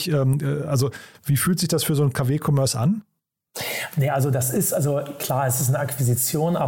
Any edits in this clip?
no; 0 cuts

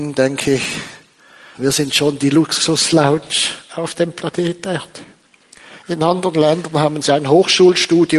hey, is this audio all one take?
no; 1 cut; at 1.5 s

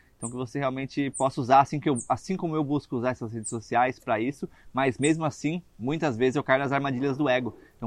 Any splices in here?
no; 0 cuts

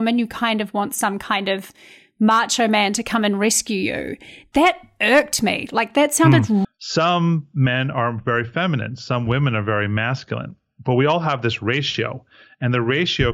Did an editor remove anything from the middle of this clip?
yes; 1 cut; at 6.6 s

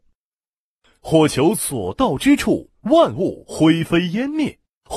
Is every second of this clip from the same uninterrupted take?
yes; 0 cuts

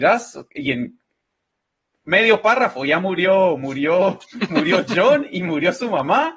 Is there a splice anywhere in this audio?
no; 0 cuts

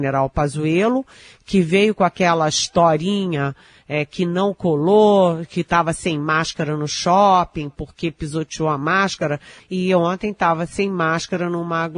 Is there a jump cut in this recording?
yes; 1 cut; at 9.6 s

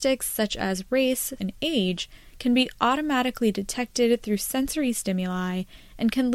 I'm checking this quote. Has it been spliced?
yes; 1 cut; at 1.4 s

